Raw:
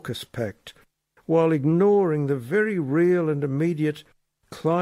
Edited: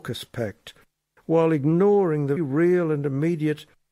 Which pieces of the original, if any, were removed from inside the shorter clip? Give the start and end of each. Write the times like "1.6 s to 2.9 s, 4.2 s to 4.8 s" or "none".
2.4 s to 2.7 s